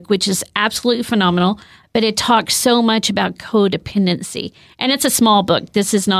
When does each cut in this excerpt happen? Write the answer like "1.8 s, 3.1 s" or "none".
1.8 s

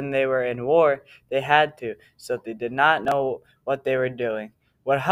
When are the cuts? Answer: none

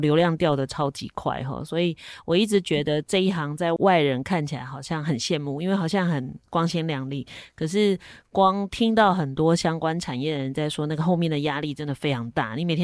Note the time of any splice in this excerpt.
none

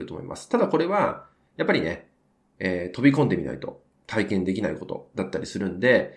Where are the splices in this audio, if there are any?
none

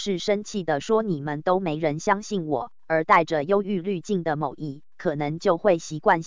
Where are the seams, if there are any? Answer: none

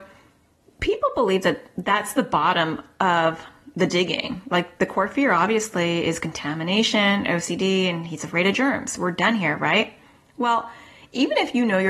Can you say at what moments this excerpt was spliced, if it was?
none

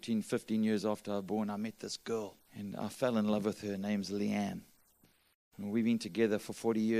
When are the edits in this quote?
2.5 s

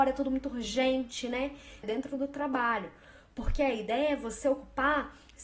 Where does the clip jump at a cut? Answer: 1.8 s

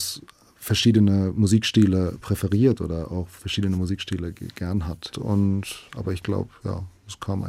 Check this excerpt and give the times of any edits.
5.1 s

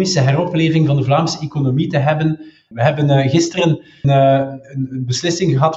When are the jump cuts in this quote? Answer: 2.7 s, 4.0 s

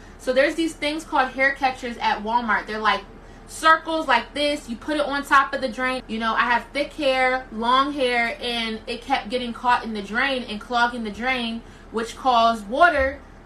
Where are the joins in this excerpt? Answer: 6.0 s

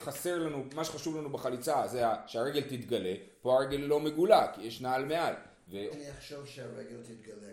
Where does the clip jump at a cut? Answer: 5.9 s

